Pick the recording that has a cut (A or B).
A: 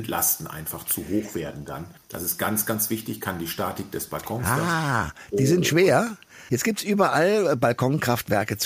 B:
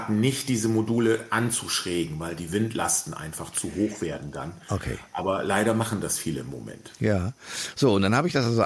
A